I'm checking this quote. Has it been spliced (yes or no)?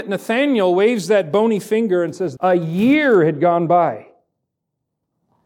yes